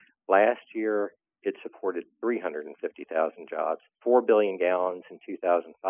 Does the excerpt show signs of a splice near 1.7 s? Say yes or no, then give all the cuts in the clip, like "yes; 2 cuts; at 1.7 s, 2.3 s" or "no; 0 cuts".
no; 1 cut; at 4.0 s